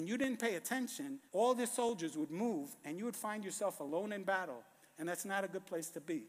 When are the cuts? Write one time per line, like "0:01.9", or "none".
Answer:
0:01.3